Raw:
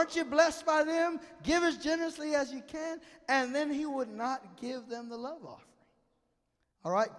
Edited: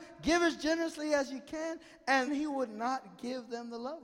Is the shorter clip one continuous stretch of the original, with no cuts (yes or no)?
no